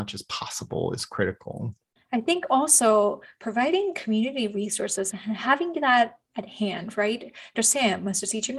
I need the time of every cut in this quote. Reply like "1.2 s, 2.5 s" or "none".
7.5 s